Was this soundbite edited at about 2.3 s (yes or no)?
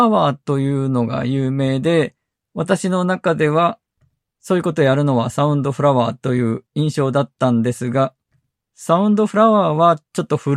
no